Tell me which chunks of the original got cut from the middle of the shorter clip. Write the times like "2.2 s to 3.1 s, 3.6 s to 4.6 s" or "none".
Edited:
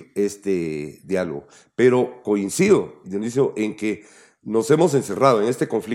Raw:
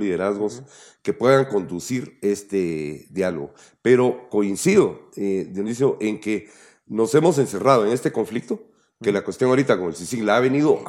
5.1 s to 5.5 s